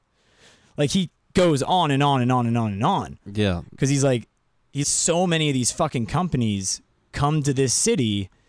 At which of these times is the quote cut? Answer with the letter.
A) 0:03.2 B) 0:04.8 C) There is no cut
B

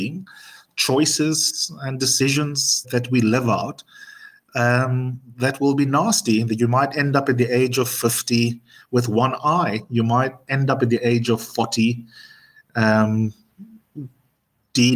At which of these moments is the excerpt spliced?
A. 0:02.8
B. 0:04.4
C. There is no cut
A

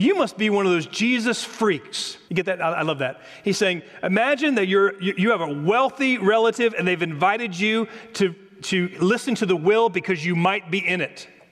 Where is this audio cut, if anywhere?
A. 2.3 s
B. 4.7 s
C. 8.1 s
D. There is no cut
A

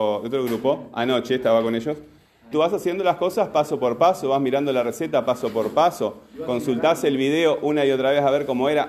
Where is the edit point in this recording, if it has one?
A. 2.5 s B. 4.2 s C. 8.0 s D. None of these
A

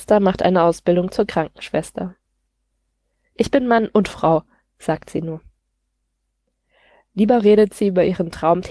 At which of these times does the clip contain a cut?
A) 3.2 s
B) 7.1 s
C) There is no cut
A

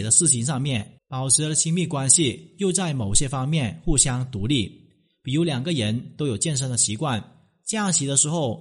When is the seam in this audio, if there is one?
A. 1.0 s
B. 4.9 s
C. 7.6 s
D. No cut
A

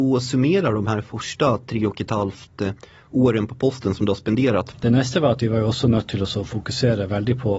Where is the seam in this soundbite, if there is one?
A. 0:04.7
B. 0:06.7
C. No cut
A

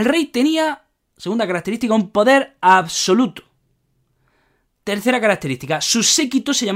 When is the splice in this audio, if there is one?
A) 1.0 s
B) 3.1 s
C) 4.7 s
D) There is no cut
D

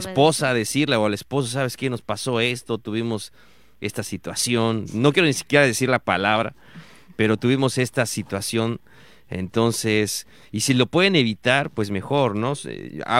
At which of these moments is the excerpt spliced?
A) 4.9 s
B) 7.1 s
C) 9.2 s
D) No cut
D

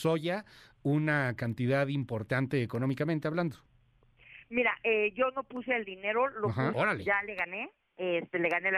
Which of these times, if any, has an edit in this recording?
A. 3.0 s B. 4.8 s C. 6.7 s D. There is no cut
C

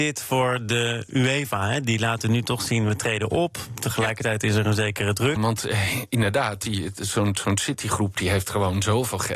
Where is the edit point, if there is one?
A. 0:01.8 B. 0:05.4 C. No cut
B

